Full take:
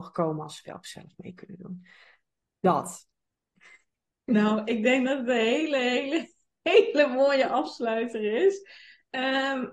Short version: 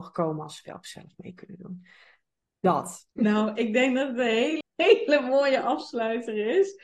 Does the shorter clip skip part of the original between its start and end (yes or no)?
yes